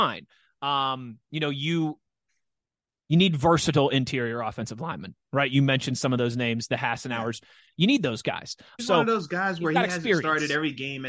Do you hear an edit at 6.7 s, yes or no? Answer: yes